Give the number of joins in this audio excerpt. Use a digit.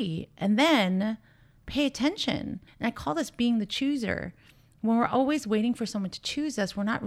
1